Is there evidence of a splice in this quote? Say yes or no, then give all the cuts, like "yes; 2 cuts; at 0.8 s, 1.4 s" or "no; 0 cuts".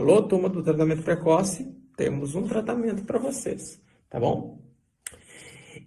no; 0 cuts